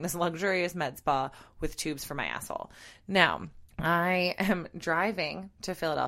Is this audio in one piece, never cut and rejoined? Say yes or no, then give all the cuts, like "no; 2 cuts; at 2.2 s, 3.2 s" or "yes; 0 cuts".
no; 1 cut; at 3.7 s